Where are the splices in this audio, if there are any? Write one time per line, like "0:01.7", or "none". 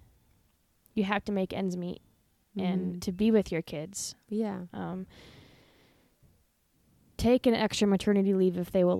0:03.0